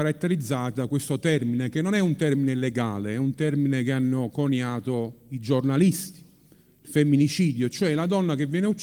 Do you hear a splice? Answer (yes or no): no